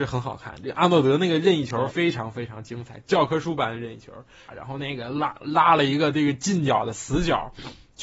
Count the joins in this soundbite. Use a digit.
2